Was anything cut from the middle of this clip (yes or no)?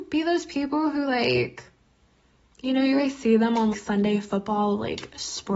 yes